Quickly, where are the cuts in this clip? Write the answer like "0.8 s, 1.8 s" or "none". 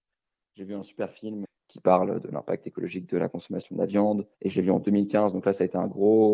1.4 s, 4.3 s